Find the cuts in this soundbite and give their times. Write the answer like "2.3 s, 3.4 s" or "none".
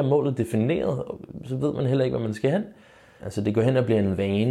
3.2 s